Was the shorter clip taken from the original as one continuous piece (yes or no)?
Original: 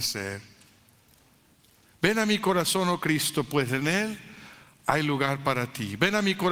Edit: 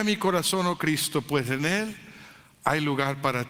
yes